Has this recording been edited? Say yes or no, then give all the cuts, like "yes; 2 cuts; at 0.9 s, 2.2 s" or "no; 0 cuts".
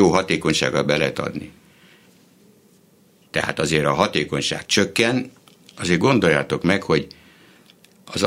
yes; 1 cut; at 3.3 s